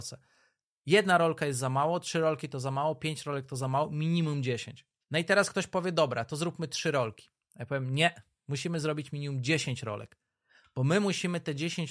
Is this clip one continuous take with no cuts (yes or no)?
no